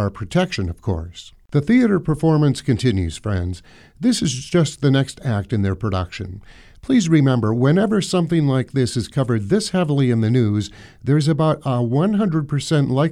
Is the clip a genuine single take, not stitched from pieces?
yes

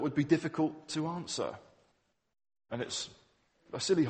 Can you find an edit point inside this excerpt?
yes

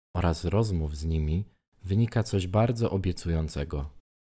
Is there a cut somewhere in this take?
no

